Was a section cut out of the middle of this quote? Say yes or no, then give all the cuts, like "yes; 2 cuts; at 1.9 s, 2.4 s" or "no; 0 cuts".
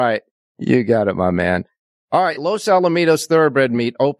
no; 0 cuts